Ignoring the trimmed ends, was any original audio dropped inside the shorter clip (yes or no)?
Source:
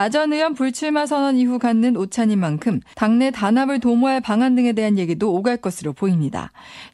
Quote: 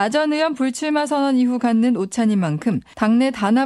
no